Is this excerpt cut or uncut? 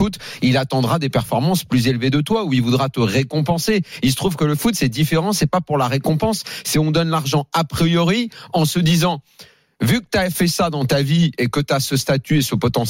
uncut